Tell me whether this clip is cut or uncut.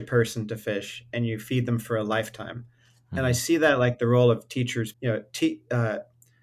cut